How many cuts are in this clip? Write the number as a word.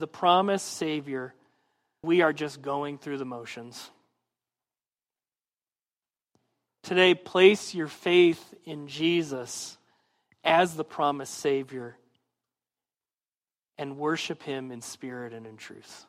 one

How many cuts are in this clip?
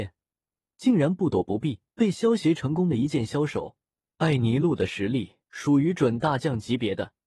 three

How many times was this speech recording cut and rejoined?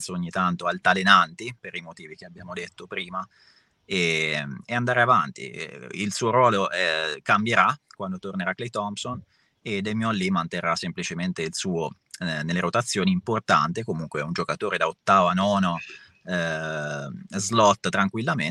zero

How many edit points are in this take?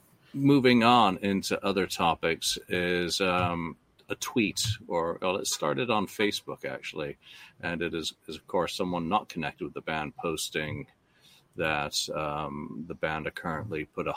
one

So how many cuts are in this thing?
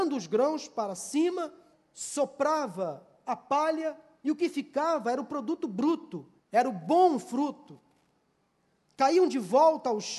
two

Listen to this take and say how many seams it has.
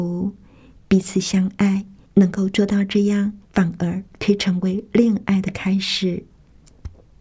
two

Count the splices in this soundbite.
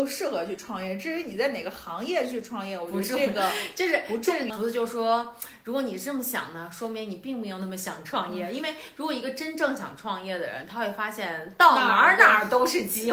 one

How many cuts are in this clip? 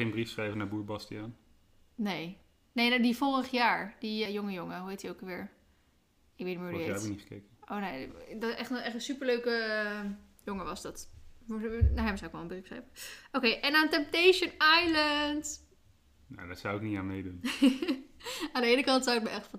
one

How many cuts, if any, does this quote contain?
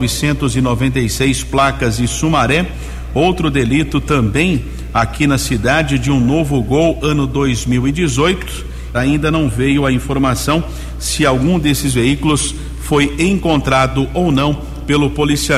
one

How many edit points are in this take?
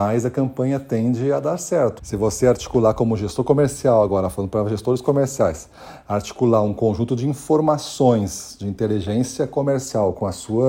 one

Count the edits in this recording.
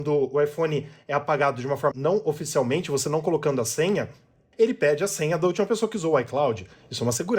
two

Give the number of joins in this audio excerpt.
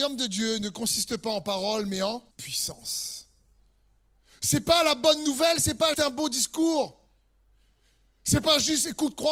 two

